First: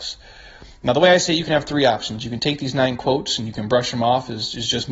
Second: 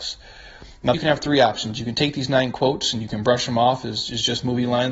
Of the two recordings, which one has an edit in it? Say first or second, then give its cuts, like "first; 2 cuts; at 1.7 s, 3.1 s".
second; 1 cut; at 0.9 s